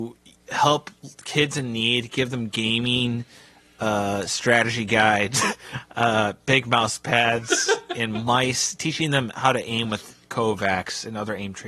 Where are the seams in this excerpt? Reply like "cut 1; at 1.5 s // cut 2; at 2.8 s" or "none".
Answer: none